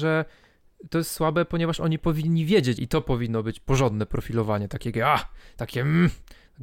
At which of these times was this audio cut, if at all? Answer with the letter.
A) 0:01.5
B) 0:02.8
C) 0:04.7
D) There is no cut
B